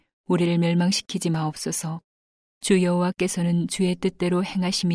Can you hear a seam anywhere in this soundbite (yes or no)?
yes